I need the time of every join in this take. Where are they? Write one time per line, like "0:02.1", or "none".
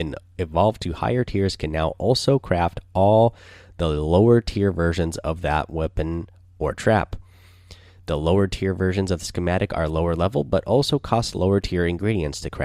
none